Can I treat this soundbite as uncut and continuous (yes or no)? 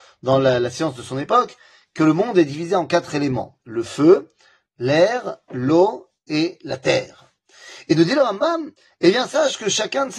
yes